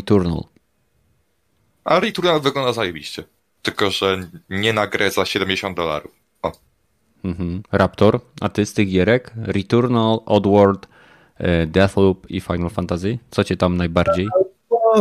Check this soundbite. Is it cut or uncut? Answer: cut